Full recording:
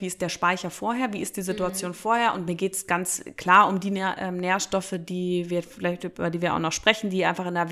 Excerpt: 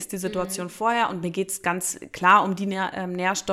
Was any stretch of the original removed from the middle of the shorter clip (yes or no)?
no